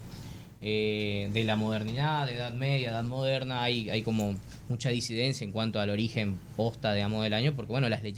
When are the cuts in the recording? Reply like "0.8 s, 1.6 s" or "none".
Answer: none